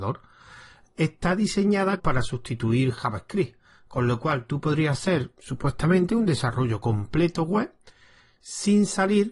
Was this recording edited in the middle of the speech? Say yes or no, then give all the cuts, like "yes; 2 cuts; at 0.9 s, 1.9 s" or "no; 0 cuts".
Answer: yes; 1 cut; at 2.0 s